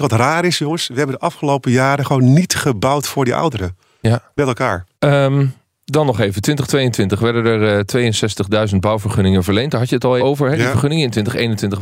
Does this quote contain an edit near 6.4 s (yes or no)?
no